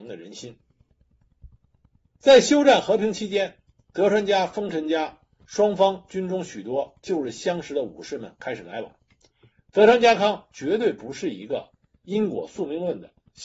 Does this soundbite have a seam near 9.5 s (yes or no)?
yes